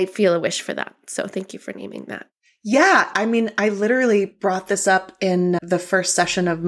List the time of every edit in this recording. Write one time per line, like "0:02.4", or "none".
0:03.1
0:05.6